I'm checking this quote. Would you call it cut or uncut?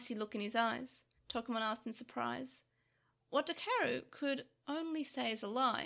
cut